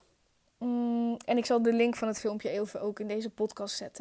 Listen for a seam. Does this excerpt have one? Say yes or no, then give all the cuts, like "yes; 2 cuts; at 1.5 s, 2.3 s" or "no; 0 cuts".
no; 0 cuts